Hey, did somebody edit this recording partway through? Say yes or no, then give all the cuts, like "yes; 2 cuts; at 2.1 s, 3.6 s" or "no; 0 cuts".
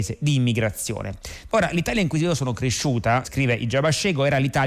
yes; 2 cuts; at 1.5 s, 3.2 s